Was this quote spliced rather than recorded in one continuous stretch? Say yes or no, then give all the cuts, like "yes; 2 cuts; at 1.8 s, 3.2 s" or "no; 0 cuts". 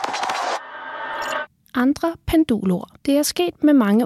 yes; 1 cut; at 3.0 s